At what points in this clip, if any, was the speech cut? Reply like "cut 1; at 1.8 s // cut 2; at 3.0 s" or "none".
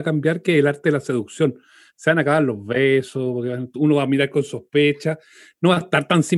none